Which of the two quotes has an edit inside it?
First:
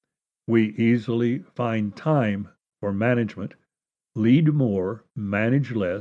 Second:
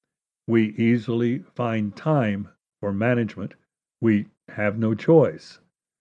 first; 1 cut; at 4.0 s

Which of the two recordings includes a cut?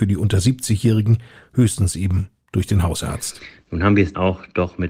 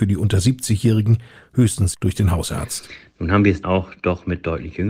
second; 1 cut; at 1.9 s

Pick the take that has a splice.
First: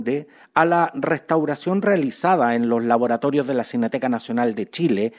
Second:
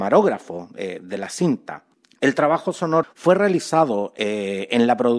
second; 1 cut; at 3.0 s

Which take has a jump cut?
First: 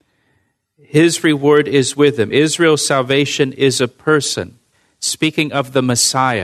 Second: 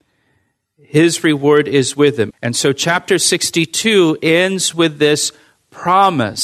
second; 1 cut; at 2.3 s

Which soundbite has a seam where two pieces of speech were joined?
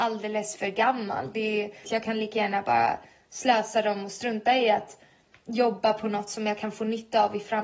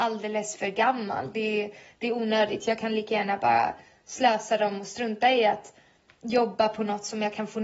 first; 1 cut; at 1.8 s

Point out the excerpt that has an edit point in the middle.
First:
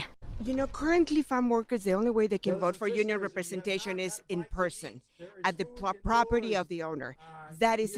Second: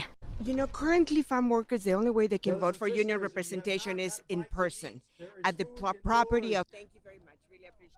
second; 1 cut; at 6.6 s

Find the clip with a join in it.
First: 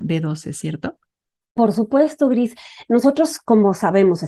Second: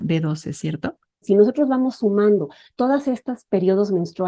second; 1 cut; at 1.2 s

